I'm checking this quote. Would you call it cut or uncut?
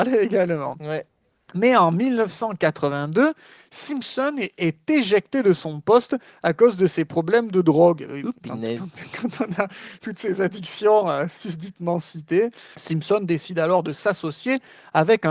cut